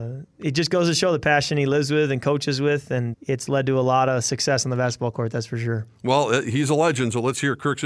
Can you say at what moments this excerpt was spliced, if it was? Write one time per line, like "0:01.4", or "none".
0:03.1